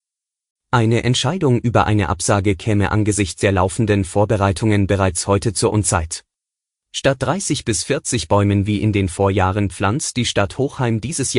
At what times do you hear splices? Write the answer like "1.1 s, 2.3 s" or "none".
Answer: 6.8 s